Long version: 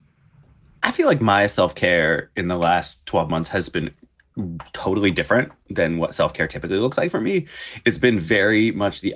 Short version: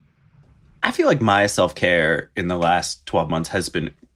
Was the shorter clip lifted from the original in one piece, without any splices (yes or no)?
yes